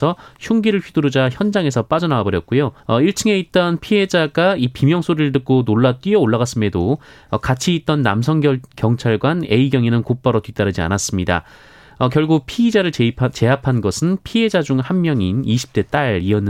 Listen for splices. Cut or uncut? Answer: cut